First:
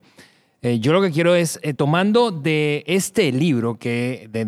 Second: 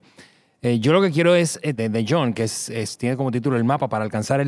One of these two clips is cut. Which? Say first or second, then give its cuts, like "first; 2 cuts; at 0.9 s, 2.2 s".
second; 1 cut; at 1.8 s